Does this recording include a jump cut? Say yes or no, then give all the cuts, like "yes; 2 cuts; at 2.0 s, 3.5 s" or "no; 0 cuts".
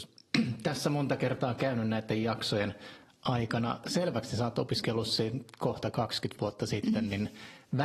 no; 0 cuts